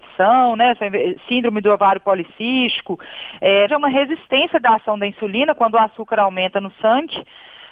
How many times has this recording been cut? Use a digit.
1